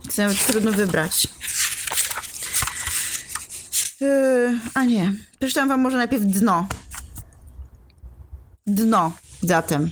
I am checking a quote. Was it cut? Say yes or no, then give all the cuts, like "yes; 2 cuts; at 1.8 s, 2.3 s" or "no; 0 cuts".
no; 0 cuts